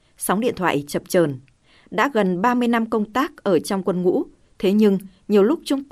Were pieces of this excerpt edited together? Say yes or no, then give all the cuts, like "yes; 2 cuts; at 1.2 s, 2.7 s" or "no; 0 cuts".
no; 0 cuts